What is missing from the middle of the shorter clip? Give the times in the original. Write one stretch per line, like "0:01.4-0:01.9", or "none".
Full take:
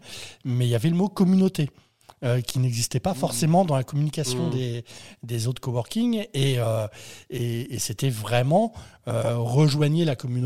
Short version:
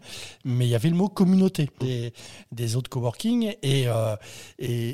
0:01.8-0:04.5

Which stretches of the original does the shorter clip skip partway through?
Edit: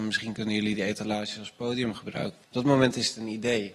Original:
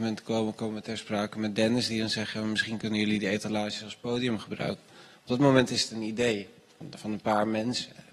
0:04.9-0:05.2

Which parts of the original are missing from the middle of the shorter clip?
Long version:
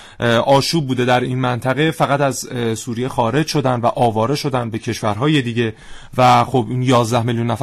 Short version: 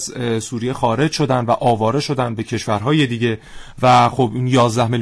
none

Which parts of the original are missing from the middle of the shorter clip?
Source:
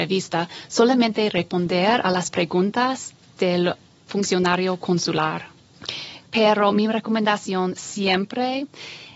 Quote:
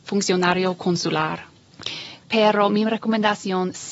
none

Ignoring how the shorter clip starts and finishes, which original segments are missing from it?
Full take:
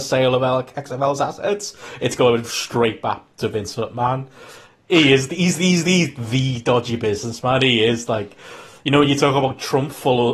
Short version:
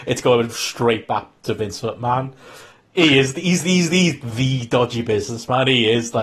none

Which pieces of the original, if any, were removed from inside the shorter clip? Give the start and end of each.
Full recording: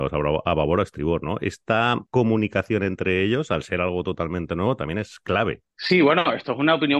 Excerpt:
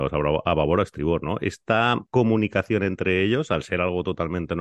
none

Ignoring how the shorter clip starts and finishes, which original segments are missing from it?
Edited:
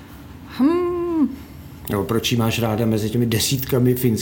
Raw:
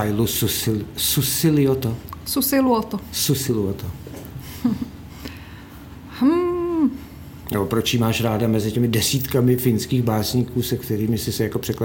none

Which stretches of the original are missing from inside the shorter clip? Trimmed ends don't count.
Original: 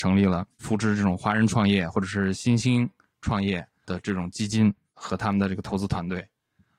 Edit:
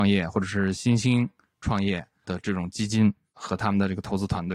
none

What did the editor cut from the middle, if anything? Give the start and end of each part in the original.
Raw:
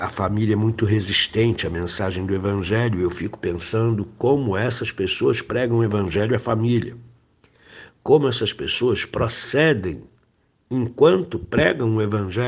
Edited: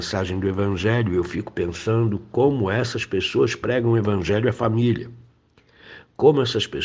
none

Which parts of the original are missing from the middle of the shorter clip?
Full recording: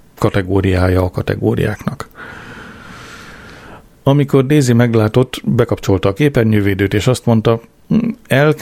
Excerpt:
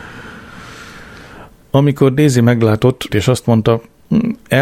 0:05.4-0:06.9

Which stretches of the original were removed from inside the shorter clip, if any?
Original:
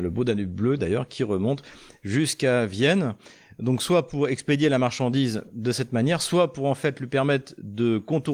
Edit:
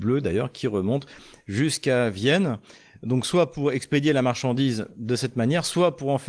none

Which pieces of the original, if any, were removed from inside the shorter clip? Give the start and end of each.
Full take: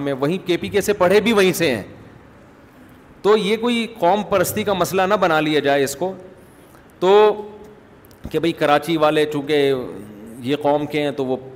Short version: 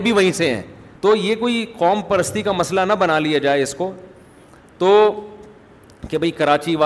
0:02.2-0:03.2

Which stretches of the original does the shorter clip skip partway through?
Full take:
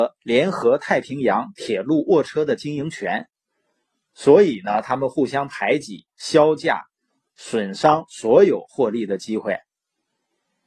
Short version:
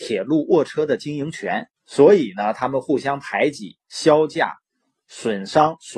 0:03.4-0:04.0

